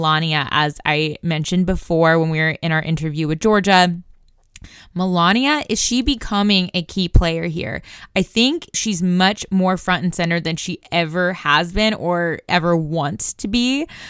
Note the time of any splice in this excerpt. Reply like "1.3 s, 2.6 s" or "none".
8.7 s, 12.5 s